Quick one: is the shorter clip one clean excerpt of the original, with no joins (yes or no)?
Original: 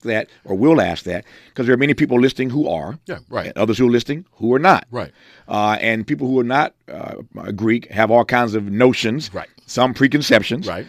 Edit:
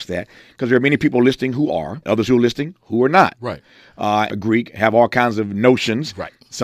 no